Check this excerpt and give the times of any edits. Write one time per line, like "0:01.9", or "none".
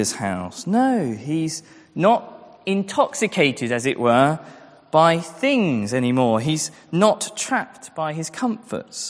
none